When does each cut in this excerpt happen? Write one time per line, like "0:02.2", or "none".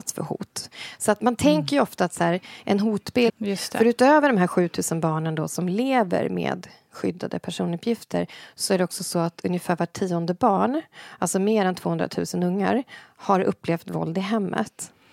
0:03.3